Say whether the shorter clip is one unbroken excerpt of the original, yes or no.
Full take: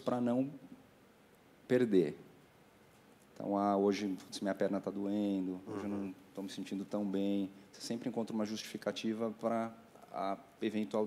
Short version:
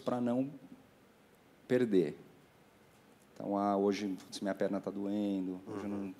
yes